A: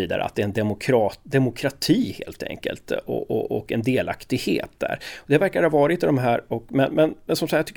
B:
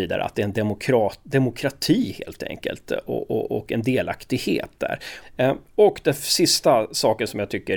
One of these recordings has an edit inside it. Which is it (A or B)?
B